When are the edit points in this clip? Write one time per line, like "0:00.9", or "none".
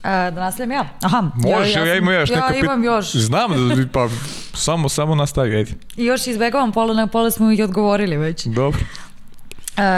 none